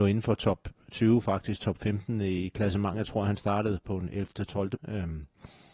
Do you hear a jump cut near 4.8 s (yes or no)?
yes